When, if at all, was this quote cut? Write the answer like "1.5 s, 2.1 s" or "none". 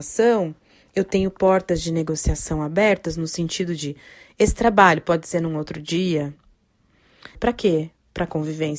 7.4 s